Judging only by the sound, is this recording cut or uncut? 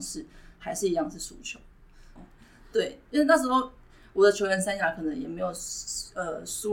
cut